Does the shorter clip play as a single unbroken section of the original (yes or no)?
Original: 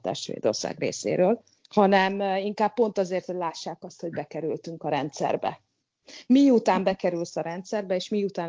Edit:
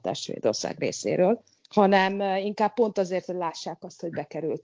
yes